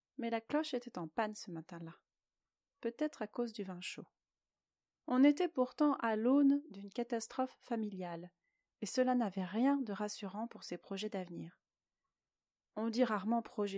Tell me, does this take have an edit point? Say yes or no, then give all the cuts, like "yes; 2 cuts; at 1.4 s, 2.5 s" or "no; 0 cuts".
no; 0 cuts